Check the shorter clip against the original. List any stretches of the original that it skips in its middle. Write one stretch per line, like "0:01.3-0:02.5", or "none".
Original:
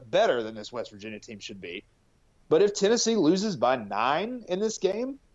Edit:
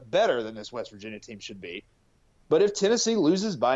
none